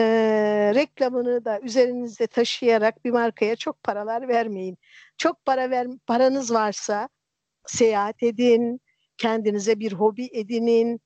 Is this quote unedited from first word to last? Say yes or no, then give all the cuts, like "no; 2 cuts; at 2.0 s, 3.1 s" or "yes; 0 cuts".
yes; 0 cuts